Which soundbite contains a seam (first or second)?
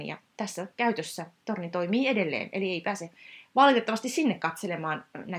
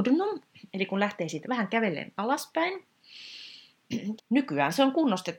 second